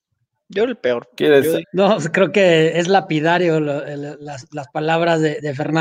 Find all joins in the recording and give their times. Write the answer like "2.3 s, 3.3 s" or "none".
1.6 s

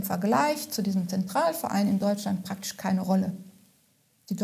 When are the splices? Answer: none

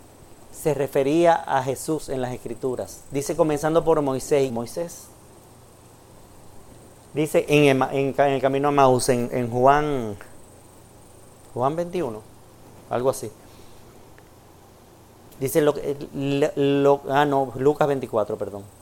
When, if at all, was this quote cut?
4.5 s

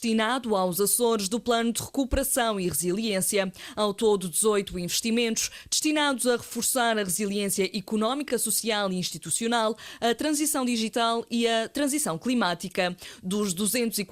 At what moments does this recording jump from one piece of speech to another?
none

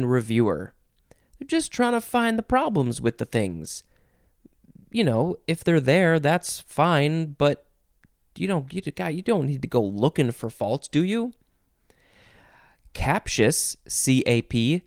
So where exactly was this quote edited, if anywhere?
none

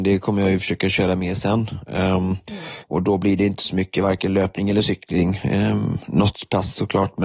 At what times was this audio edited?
2.8 s

